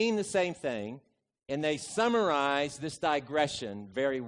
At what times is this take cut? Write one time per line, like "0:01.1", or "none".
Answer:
none